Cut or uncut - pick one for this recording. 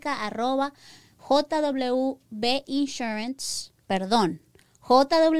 uncut